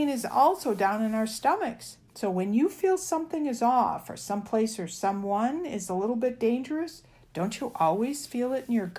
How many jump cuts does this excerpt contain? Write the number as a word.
one